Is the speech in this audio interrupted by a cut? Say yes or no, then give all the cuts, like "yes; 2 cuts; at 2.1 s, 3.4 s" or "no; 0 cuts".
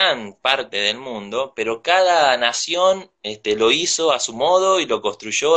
no; 0 cuts